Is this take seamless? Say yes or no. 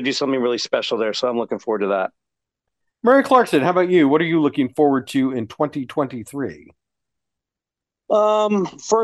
no